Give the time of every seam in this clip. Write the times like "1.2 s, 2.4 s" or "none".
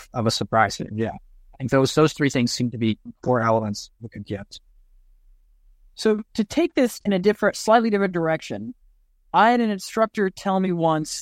none